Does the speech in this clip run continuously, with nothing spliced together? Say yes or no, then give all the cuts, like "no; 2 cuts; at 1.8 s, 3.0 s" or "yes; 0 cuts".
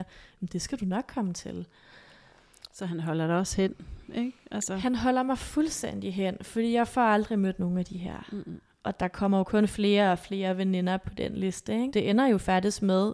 no; 1 cut; at 11.9 s